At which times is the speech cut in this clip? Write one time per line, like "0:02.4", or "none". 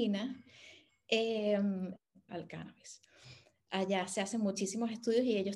0:02.3